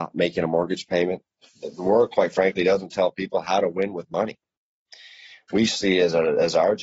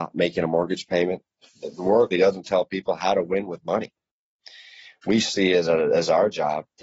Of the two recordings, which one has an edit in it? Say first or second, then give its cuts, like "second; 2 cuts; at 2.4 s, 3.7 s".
second; 1 cut; at 2.1 s